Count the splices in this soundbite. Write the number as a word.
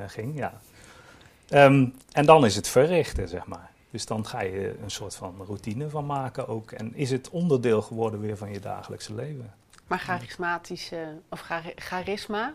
zero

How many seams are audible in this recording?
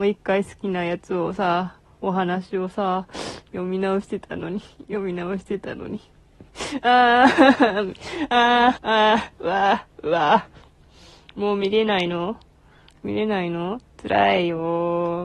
one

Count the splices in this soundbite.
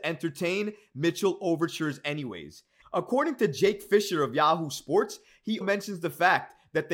two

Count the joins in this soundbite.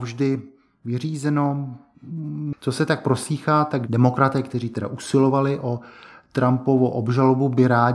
one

